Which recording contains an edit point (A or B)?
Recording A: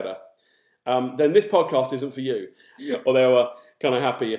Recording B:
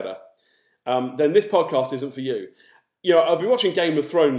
A